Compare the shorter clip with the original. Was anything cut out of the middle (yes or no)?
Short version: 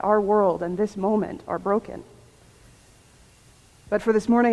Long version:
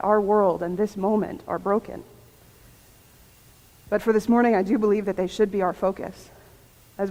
no